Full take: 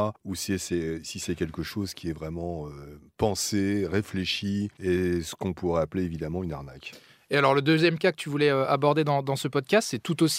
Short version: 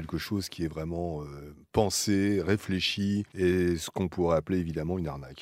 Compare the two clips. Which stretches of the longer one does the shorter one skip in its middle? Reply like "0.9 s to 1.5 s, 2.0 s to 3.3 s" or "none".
none